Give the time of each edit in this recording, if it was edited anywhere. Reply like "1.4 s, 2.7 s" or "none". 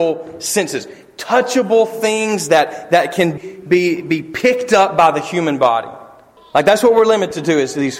3.4 s, 6.4 s